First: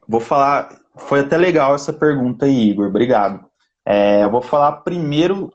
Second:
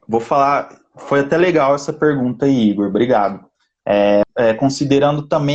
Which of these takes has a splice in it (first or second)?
second